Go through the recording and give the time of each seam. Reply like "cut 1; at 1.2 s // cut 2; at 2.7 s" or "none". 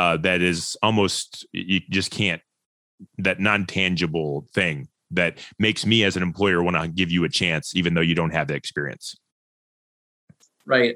cut 1; at 3.1 s